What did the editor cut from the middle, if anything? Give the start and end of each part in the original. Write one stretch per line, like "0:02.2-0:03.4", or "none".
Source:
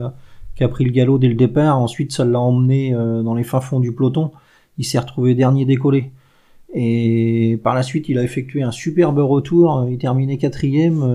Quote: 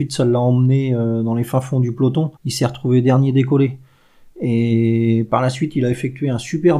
0:04.4-0:04.7

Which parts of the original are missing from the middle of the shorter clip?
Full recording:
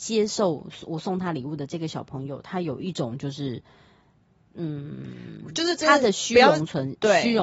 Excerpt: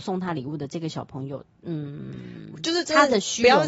0:02.4-0:04.3

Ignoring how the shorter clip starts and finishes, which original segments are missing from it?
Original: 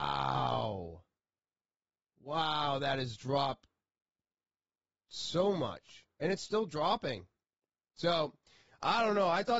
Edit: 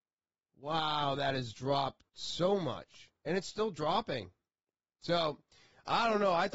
0:03.7-0:05.0

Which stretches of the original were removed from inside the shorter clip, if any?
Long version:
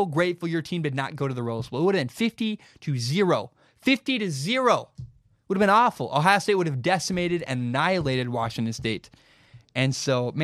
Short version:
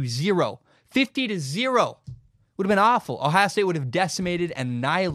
none

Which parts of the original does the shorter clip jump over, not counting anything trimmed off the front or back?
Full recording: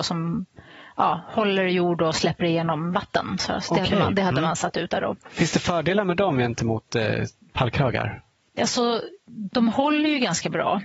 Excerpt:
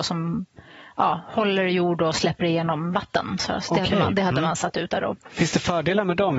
none

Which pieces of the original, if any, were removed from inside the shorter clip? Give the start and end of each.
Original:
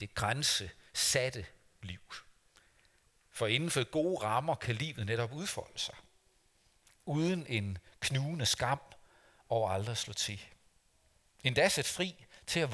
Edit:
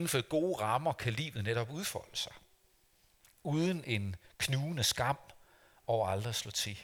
none

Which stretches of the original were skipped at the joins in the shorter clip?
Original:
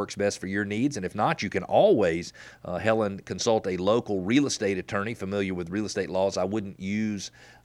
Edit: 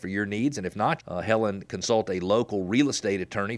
0:01.4-0:02.5

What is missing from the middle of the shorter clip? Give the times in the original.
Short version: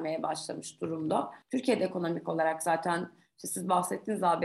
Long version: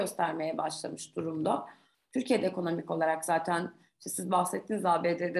0:01.8-0:02.0

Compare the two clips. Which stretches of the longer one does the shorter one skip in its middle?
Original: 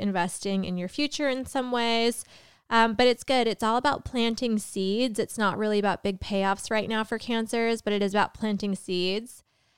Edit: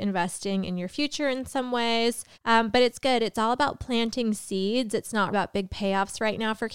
0:02.3-0:02.6
0:05.6-0:05.8

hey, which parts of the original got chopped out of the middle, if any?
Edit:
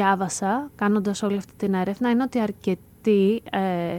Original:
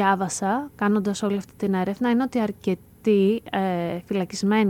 none

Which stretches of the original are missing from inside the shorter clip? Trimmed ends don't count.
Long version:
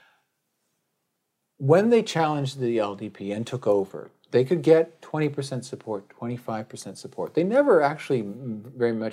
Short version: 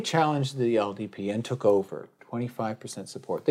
0:04.2-0:06.1

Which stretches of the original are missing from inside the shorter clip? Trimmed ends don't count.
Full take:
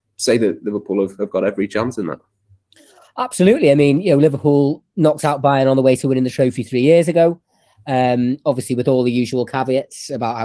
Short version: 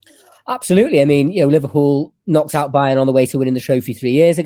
none

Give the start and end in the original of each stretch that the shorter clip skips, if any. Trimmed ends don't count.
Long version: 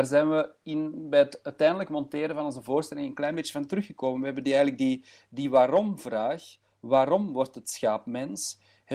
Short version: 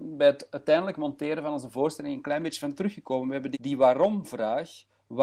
0:04.5-0:05.3

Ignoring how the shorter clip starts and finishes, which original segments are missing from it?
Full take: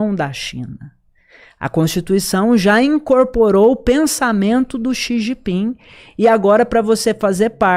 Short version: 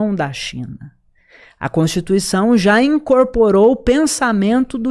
none

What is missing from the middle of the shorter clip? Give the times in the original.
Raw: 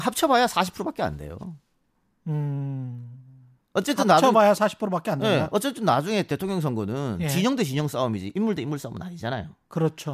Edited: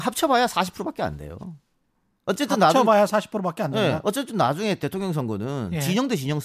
0:02.1-0:03.6

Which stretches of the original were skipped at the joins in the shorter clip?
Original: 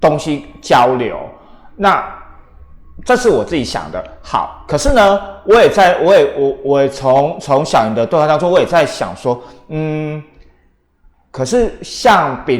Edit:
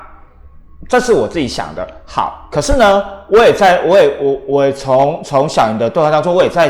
none

